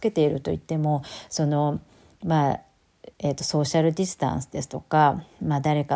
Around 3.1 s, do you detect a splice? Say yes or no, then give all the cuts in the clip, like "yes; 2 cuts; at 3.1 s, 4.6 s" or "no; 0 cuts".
yes; 1 cut; at 3.1 s